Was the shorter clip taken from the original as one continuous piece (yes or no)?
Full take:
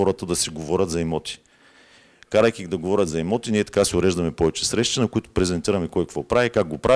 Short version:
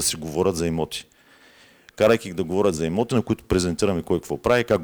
no